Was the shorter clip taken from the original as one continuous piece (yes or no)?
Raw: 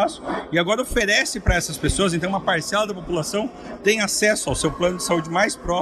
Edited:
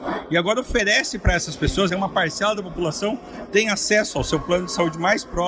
no